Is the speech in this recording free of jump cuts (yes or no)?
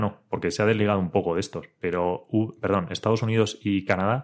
yes